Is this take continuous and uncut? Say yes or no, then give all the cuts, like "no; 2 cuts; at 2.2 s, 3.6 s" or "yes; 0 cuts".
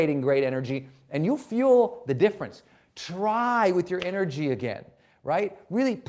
yes; 0 cuts